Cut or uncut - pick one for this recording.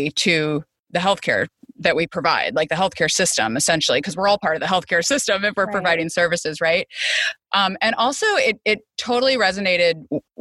uncut